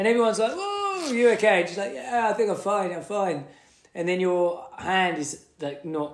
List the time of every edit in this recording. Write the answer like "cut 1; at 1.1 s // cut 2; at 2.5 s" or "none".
none